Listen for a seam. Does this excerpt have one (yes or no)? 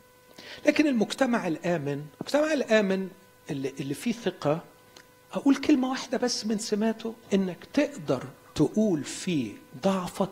yes